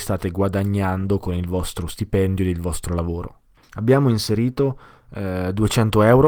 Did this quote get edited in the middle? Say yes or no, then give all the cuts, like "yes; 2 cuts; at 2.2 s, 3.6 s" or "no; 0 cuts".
yes; 1 cut; at 3.6 s